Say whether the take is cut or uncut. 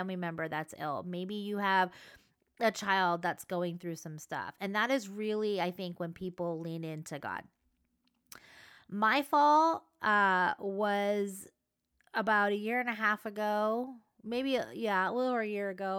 uncut